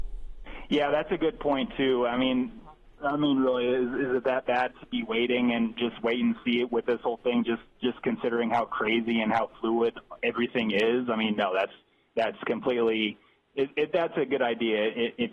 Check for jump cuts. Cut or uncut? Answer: uncut